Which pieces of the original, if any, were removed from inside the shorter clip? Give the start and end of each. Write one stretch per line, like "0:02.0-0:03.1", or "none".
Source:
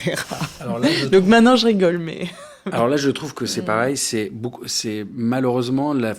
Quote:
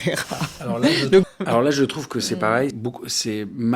0:01.2-0:02.5
0:04.0-0:04.3